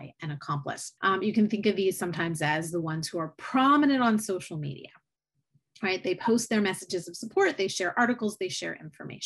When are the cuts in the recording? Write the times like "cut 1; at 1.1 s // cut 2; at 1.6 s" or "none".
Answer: cut 1; at 1.0 s

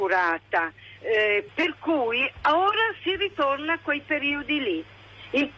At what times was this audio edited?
cut 1; at 1.5 s

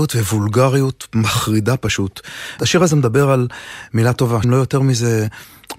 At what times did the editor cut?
cut 1; at 2.6 s // cut 2; at 4.4 s

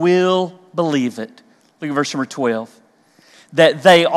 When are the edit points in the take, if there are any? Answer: none

